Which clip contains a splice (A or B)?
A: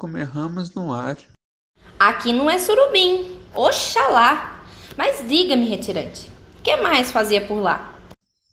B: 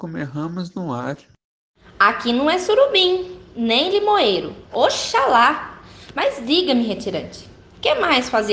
A